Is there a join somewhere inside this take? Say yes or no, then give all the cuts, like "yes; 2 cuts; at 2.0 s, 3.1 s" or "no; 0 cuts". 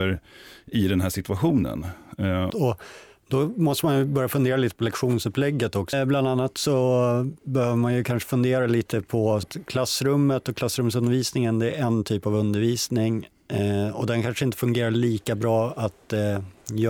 yes; 3 cuts; at 2.5 s, 5.9 s, 9.4 s